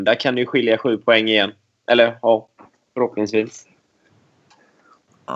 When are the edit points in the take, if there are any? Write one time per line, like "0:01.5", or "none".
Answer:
none